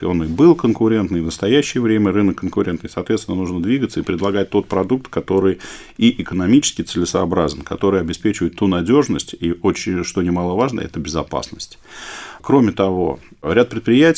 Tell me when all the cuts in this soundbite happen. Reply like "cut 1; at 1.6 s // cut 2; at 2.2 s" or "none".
none